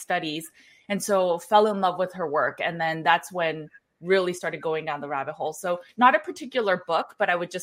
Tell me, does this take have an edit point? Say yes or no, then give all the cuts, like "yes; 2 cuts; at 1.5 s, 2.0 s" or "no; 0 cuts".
no; 0 cuts